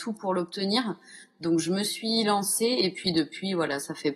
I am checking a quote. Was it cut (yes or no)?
no